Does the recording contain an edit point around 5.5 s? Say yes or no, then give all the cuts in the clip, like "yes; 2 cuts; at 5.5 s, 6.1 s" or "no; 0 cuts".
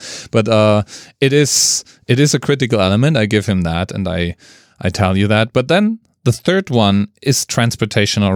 no; 0 cuts